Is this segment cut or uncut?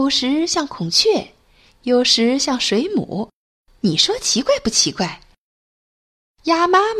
uncut